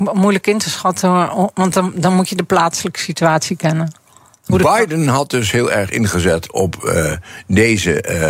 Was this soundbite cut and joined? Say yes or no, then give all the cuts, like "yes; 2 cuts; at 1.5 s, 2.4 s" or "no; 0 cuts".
no; 0 cuts